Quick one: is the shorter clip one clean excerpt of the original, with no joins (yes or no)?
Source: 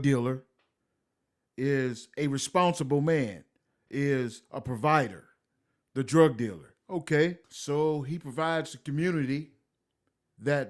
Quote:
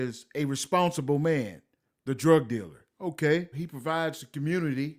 no